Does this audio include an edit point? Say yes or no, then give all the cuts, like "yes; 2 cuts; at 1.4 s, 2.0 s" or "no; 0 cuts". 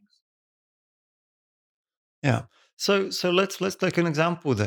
no; 0 cuts